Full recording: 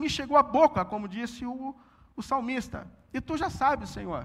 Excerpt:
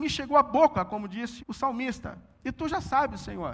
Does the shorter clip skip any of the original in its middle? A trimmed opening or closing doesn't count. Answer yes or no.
yes